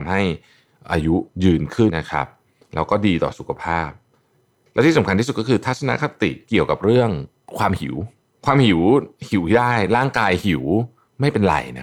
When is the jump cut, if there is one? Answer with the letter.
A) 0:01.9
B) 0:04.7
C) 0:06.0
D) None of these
A